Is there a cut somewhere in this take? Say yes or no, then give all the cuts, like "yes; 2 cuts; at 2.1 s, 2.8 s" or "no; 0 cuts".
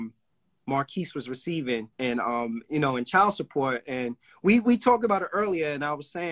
yes; 1 cut; at 1.9 s